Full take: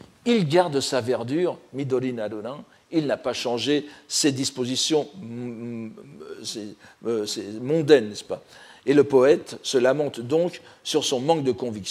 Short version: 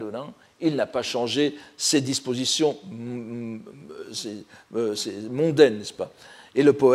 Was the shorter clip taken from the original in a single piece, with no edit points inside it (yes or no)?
yes